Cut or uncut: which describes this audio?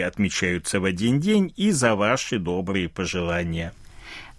uncut